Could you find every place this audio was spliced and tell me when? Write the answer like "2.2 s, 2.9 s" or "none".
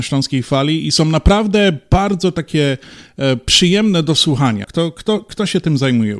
4.6 s